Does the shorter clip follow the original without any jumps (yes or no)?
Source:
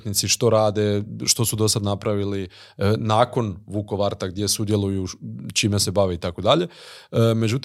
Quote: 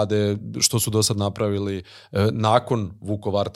yes